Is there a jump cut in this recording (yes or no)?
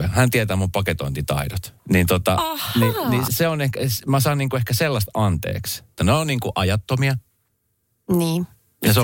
yes